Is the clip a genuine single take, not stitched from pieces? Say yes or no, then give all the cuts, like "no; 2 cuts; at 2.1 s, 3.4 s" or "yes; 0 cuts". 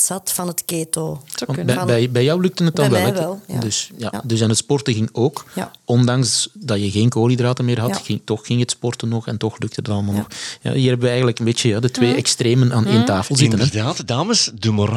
yes; 0 cuts